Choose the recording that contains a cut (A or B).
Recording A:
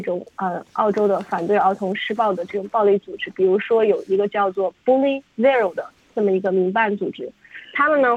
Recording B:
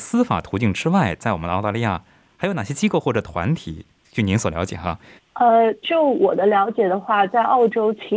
B